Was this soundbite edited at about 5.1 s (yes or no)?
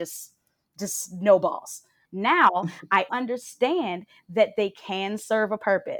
no